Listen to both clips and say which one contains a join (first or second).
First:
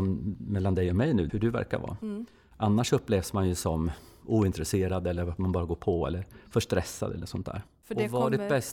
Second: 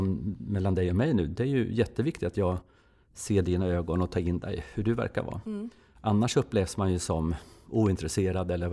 first